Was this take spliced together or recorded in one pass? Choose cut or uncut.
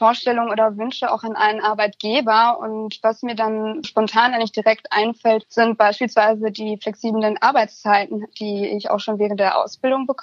cut